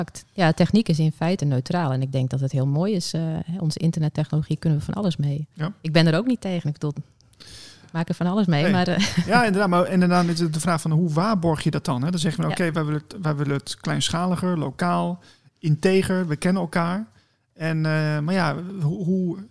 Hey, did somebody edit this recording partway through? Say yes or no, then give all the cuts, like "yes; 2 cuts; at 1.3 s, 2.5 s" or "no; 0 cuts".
no; 0 cuts